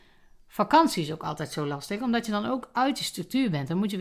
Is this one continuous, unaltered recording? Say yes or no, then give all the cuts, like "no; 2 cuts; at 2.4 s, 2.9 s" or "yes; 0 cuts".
yes; 0 cuts